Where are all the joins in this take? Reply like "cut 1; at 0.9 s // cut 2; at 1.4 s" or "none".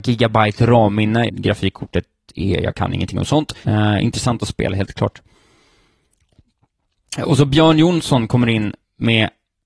cut 1; at 1.3 s // cut 2; at 3.6 s